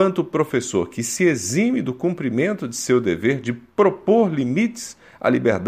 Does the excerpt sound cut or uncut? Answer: uncut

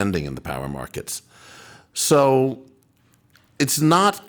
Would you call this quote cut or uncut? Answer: uncut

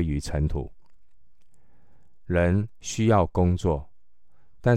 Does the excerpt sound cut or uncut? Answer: cut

